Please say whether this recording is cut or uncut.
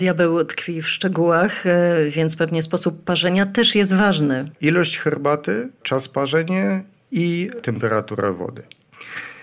cut